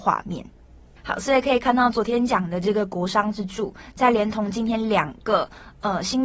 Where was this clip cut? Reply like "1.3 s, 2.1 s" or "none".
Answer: none